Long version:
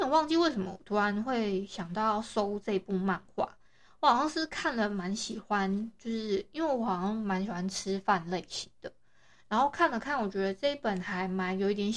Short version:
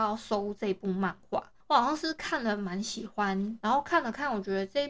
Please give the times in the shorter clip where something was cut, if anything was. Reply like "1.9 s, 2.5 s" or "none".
1.6 s, 3.6 s